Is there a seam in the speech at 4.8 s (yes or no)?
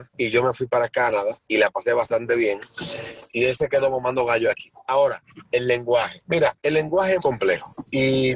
no